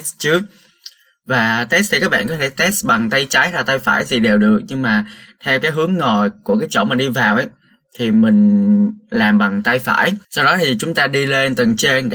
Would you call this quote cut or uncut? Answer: cut